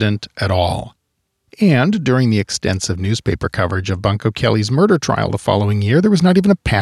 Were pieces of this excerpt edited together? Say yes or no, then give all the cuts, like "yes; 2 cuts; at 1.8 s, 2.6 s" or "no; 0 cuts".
no; 0 cuts